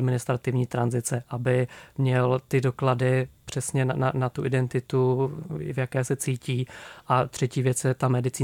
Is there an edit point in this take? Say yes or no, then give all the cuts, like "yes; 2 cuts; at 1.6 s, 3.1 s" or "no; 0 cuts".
no; 0 cuts